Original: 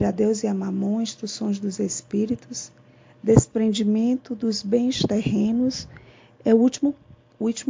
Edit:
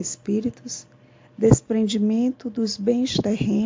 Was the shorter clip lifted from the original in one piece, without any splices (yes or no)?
yes